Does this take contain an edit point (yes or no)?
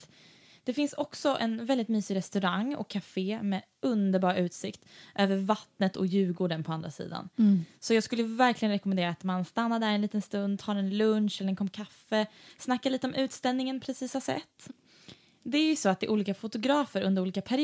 no